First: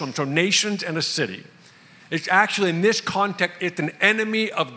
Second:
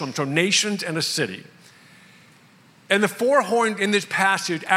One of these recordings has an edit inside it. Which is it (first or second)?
first